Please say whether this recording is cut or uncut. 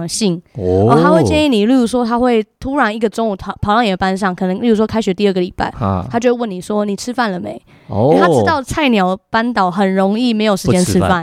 uncut